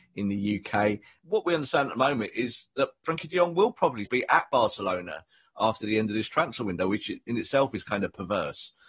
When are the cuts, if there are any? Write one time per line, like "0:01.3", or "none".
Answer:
0:01.2
0:04.1